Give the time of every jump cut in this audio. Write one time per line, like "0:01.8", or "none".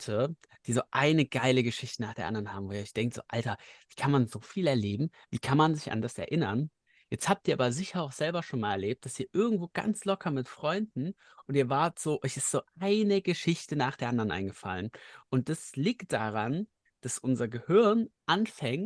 none